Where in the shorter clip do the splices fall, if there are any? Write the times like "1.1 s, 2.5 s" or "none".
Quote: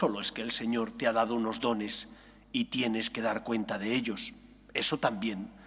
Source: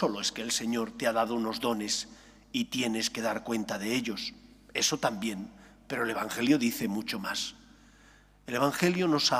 none

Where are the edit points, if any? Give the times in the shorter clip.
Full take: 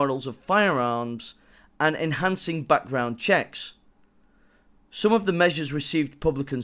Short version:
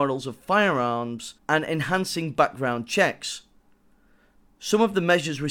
1.4 s

